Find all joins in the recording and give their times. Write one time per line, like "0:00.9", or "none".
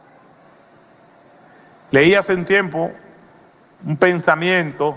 none